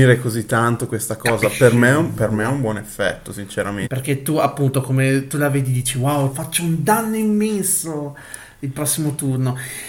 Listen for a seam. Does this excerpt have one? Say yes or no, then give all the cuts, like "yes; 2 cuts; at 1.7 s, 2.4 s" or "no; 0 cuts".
yes; 2 cuts; at 3.8 s, 6.3 s